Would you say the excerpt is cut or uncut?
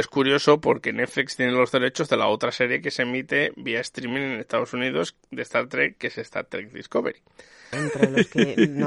cut